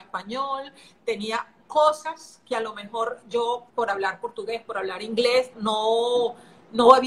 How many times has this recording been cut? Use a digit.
2